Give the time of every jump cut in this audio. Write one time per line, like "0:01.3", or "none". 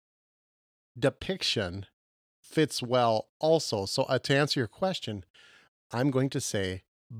none